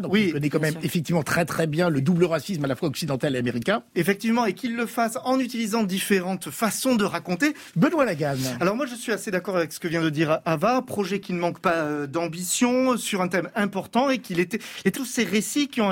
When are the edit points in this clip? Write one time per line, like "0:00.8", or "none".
0:07.7
0:14.9